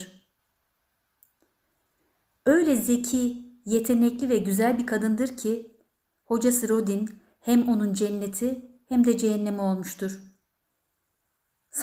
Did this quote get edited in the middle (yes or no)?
no